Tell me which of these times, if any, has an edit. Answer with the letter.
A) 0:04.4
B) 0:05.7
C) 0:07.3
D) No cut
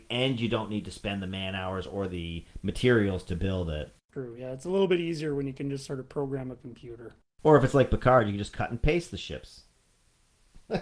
D